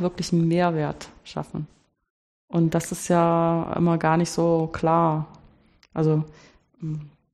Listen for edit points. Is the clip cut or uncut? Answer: uncut